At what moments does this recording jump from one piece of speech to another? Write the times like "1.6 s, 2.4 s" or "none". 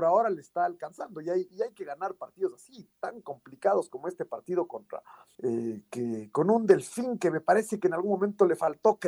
1.5 s, 5.3 s